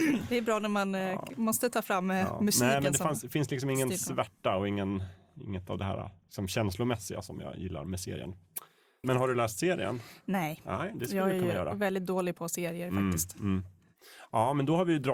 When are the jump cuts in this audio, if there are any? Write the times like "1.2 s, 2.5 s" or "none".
9.0 s